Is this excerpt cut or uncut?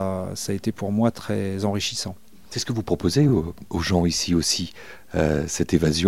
uncut